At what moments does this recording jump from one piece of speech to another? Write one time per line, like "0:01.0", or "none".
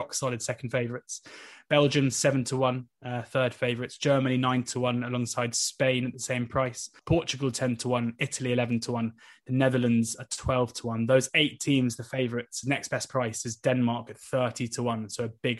0:07.0
0:12.6